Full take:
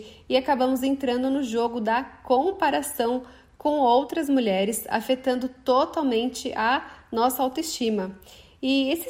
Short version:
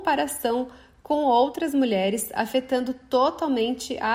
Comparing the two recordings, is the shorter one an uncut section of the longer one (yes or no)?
yes